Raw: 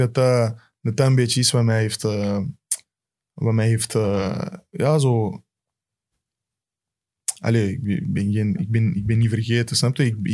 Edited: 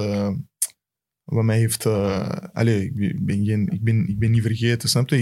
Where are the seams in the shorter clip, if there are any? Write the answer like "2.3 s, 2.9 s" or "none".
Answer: 2.5 s